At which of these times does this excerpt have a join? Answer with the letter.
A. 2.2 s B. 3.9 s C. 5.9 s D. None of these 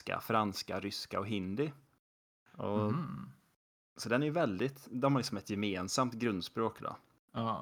D